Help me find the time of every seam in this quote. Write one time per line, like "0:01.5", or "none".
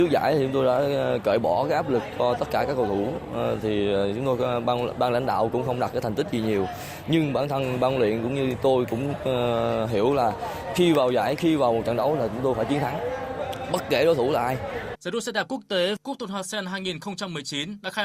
0:14.9